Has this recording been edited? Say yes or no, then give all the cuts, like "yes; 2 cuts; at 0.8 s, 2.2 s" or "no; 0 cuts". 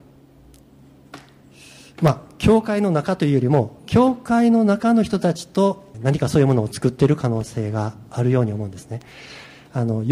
yes; 1 cut; at 5.9 s